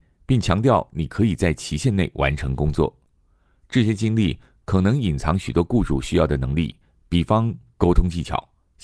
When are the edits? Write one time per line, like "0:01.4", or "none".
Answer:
none

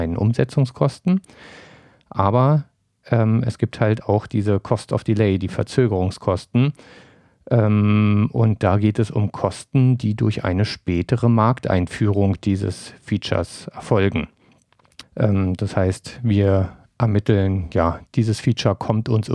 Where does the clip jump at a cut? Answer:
0:15.0
0:18.1

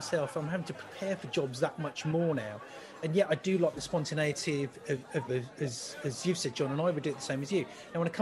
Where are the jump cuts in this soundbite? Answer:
0:05.3

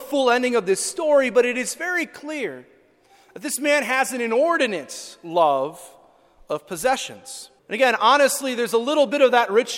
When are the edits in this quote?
0:07.6

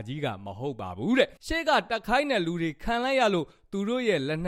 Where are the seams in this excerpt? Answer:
0:01.4

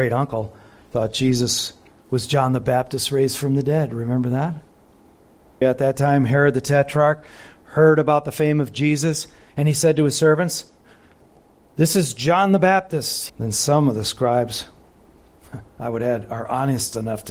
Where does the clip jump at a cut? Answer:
0:05.6
0:13.3

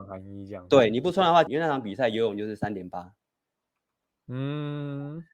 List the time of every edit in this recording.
0:01.5

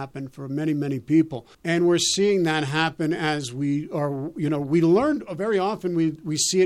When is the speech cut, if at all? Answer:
0:01.5

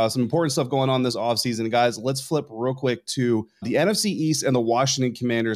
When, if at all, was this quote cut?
0:03.6

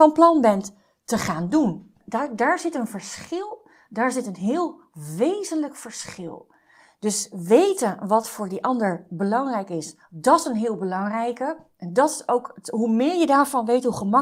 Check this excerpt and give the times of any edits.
none

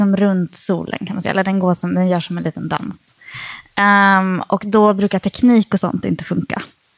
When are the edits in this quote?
none

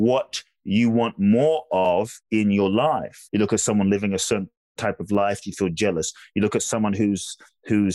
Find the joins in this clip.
0:03.3

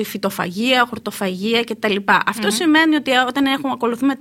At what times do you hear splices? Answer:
none

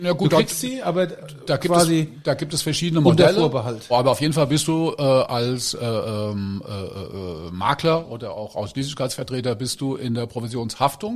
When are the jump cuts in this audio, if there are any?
0:03.9

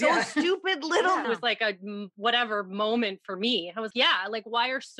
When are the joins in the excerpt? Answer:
0:01.2
0:03.9

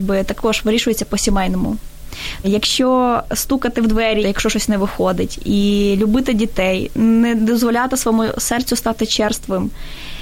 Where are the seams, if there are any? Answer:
0:02.4
0:04.2

